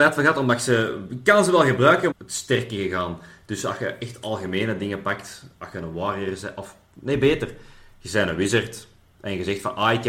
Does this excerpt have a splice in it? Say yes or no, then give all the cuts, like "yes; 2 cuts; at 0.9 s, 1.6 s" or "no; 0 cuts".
yes; 1 cut; at 2.1 s